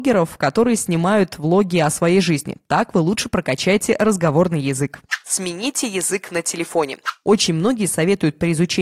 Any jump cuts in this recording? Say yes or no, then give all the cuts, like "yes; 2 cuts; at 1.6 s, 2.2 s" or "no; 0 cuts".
no; 0 cuts